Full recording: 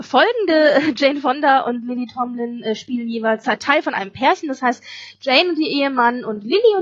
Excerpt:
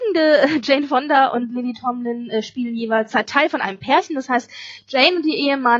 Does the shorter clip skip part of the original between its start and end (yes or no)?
no